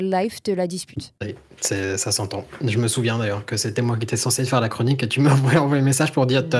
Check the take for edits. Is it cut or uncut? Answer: uncut